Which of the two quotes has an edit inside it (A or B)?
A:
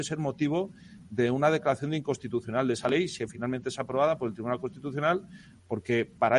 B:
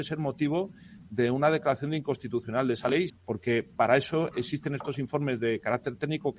B